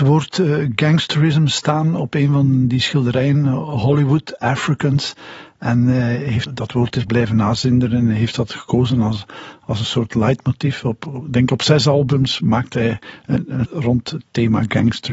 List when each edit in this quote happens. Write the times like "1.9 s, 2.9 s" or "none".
6.5 s, 13.6 s

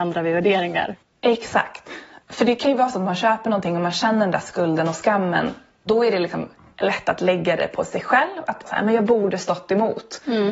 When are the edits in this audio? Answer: none

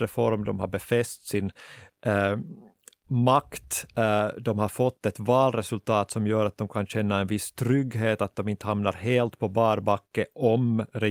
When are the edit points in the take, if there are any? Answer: none

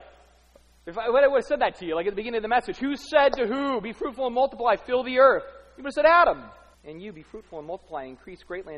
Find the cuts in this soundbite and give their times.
6.7 s

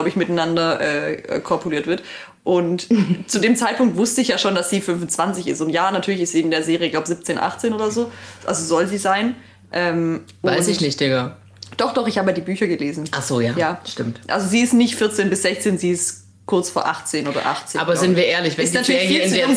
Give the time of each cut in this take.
none

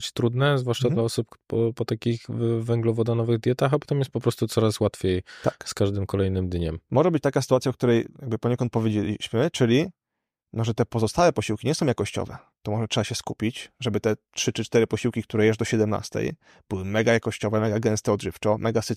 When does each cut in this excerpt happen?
none

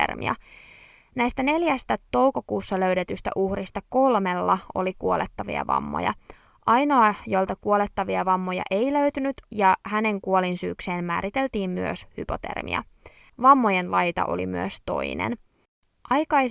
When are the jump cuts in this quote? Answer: 9.5 s, 13.3 s

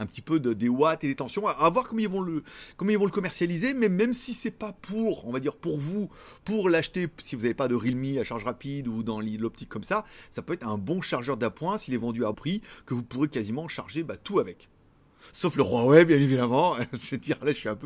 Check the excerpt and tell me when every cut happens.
12.3 s

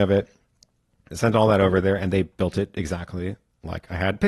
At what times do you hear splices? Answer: 1.1 s

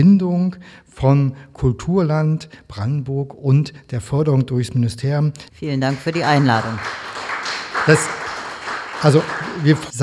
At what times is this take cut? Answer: 5.5 s

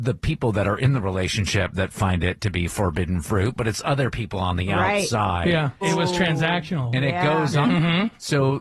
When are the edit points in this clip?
5.8 s, 7.6 s

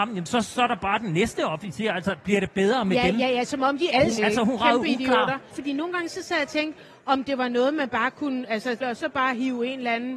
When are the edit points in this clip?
4.2 s, 5.5 s, 8.8 s

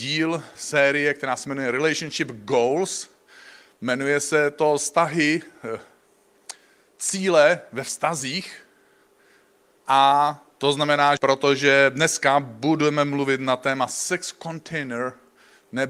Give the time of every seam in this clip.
11.2 s

